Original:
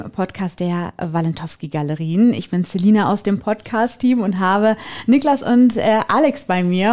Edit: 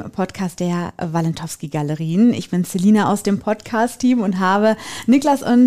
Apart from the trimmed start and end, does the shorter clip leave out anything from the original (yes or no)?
no